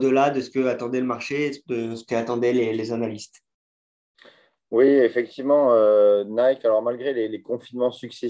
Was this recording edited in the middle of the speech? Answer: no; 0 cuts

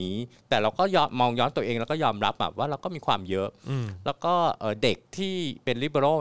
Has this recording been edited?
yes; 1 cut; at 5.0 s

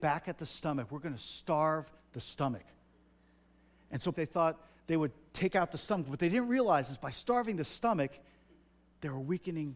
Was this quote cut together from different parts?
yes; 1 cut; at 4.1 s

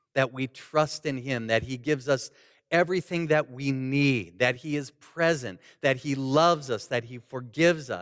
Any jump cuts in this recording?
no; 0 cuts

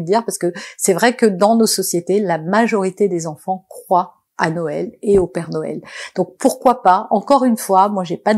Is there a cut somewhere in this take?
no; 0 cuts

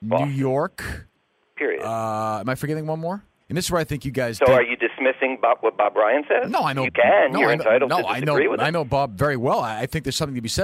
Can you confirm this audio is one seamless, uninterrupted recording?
no; 1 cut; at 3.4 s

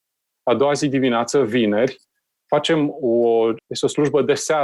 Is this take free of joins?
no; 1 cut; at 3.6 s

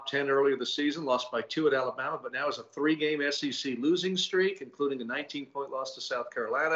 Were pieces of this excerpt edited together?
no; 0 cuts

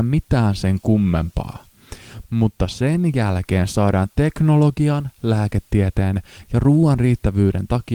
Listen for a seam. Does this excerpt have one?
yes; 1 cut; at 2.2 s

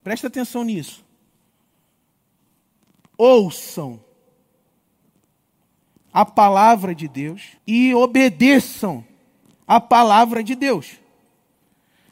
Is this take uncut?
no; 1 cut; at 7.6 s

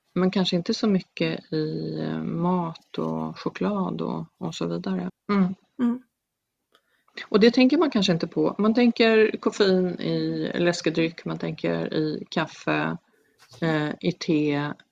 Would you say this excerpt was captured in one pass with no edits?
no; 1 cut; at 5.1 s

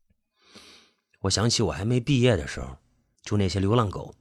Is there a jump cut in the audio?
yes; 1 cut; at 3.2 s

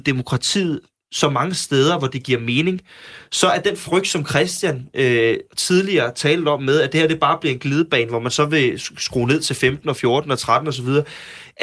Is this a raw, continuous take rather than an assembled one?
yes; 0 cuts

